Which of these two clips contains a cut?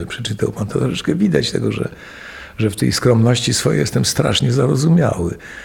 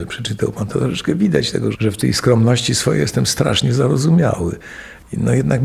second; 1 cut; at 1.7 s

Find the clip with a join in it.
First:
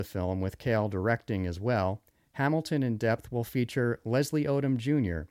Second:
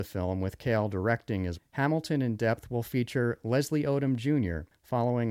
second; 1 cut; at 1.5 s

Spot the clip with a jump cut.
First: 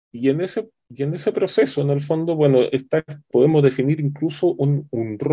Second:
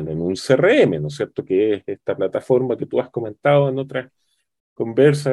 first; 1 cut; at 3.3 s

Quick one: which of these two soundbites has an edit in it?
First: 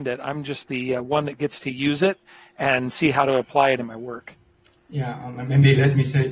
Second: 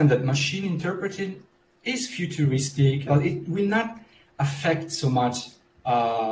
second; 1 cut; at 3.1 s

